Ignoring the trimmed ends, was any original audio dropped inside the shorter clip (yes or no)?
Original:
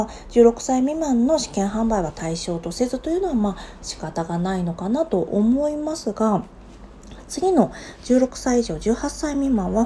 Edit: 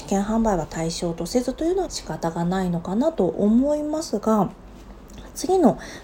yes